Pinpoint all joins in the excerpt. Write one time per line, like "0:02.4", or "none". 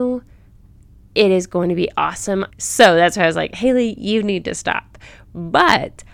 0:02.5